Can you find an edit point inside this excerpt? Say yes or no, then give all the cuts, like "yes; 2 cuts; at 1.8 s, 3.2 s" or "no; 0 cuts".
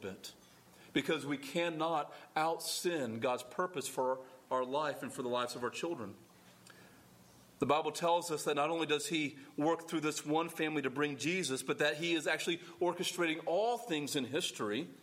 no; 0 cuts